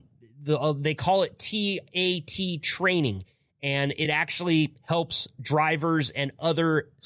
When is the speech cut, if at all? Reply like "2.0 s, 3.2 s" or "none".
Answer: none